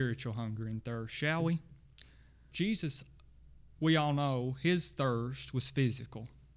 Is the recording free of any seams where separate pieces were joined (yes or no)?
no